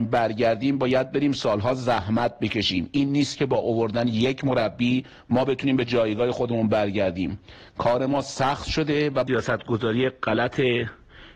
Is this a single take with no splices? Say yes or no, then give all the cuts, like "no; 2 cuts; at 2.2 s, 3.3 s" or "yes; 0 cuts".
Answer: yes; 0 cuts